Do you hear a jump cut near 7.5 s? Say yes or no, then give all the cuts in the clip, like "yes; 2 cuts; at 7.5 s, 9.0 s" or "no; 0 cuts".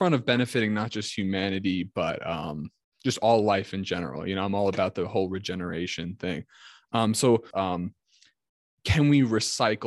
yes; 1 cut; at 7.5 s